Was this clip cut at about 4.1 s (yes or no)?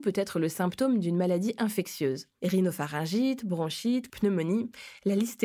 yes